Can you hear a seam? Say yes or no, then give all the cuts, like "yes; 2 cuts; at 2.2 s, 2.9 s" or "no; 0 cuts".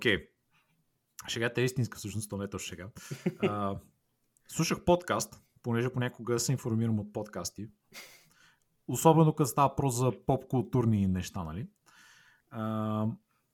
no; 0 cuts